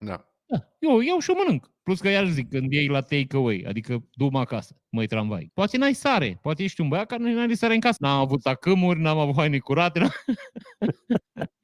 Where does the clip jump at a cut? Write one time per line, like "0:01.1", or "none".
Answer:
0:05.5
0:08.0